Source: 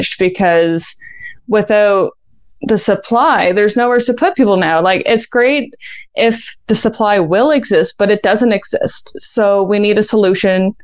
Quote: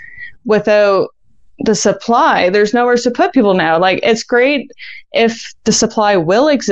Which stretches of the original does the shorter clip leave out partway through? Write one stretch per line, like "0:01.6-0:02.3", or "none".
none